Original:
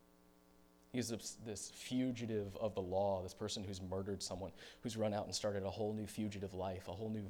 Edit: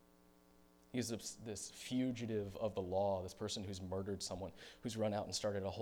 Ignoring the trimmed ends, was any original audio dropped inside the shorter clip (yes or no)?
no